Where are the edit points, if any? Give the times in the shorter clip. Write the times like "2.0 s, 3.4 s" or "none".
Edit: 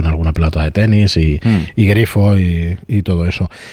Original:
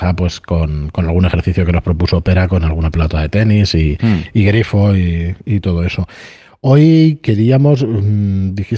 none